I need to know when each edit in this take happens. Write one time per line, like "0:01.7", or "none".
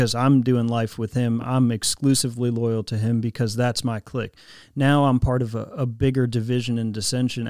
none